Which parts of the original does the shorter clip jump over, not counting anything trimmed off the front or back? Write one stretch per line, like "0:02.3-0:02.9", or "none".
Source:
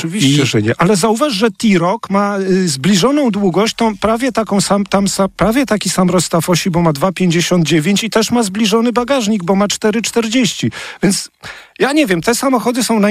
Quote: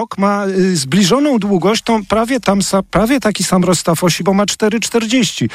0:04.3-0:04.9
0:06.6-0:09.4